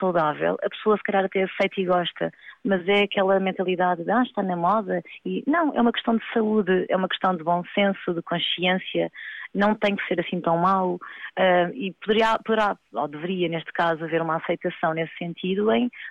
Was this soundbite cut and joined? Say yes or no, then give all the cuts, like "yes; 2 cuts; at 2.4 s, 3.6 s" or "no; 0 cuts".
no; 0 cuts